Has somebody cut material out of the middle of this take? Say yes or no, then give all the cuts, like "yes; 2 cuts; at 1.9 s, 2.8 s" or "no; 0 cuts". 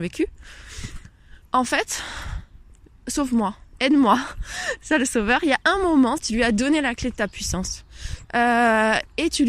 yes; 3 cuts; at 1.5 s, 6.2 s, 8.2 s